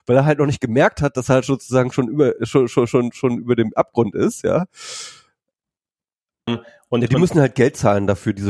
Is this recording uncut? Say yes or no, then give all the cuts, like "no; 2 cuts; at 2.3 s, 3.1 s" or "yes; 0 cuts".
no; 1 cut; at 6.5 s